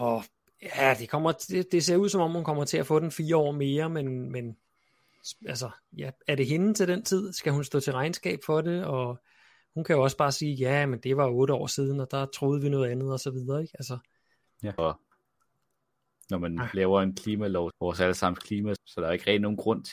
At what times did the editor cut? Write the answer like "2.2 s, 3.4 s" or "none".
14.8 s, 17.7 s, 18.8 s

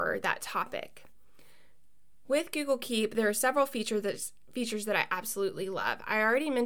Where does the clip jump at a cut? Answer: none

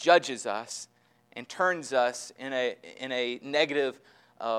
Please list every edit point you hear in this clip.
none

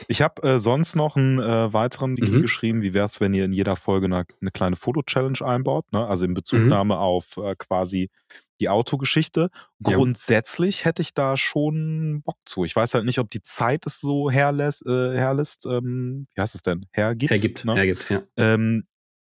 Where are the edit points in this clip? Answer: 2.2 s

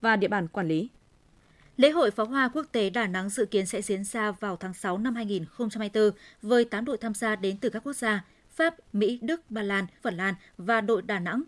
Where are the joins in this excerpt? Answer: 8.8 s, 10.0 s

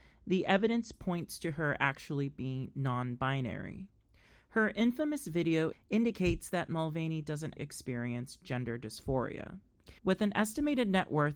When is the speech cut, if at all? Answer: 5.7 s, 7.6 s, 10.0 s

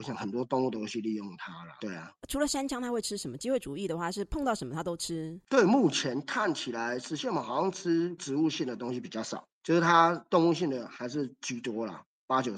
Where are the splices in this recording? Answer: none

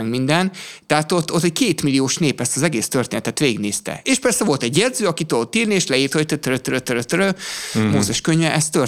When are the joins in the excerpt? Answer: none

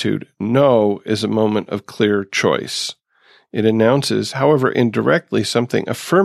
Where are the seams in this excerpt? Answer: none

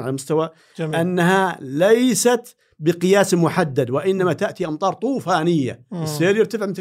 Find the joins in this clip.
none

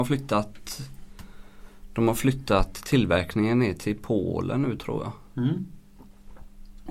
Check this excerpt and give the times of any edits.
none

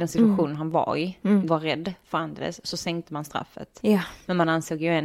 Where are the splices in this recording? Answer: 1.5 s

